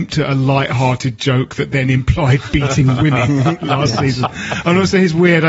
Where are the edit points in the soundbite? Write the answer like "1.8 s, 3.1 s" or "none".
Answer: none

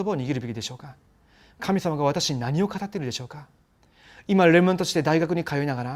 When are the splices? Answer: none

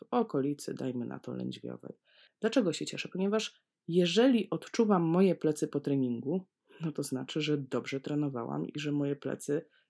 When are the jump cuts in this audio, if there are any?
2.3 s

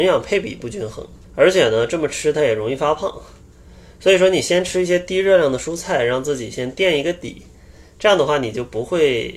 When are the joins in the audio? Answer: 1.2 s

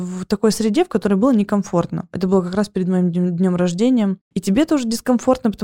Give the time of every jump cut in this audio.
2.1 s, 4.3 s

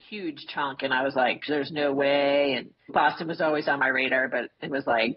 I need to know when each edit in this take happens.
1.5 s, 2.9 s

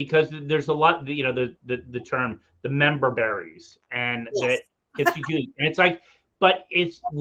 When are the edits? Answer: none

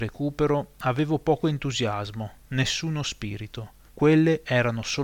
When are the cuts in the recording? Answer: 3.9 s

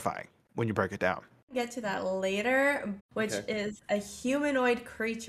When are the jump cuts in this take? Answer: 3.0 s

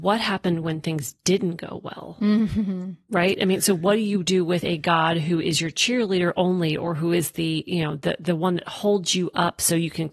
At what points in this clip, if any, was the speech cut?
none

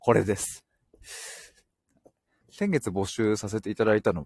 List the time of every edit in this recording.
2.4 s

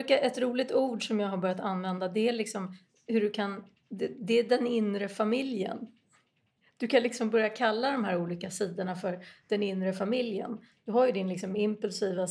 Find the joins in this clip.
none

